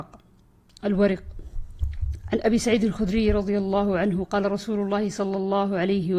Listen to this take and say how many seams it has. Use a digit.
1